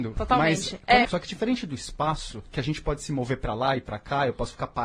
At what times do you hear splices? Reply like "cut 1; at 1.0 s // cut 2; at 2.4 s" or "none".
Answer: cut 1; at 1.0 s